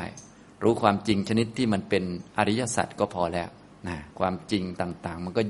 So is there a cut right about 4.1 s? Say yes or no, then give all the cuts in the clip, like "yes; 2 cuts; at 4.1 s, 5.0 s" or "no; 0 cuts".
yes; 1 cut; at 4.1 s